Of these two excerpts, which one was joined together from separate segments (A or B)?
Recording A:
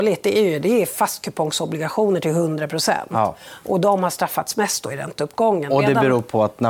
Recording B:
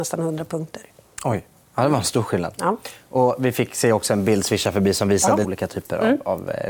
B